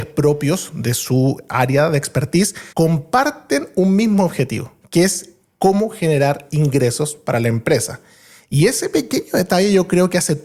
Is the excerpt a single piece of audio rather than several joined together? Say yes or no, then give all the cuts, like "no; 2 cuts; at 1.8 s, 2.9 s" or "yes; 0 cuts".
no; 1 cut; at 2.7 s